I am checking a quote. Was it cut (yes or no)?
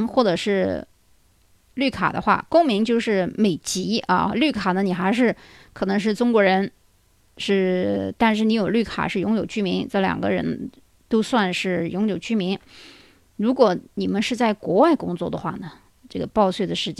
no